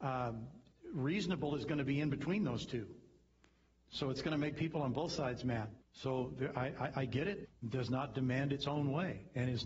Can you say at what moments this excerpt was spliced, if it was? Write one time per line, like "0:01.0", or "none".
0:05.8
0:07.4